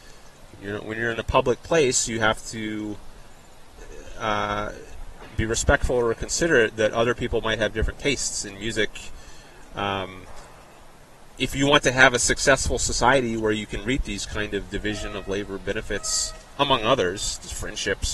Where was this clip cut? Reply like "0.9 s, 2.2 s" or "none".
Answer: 11.3 s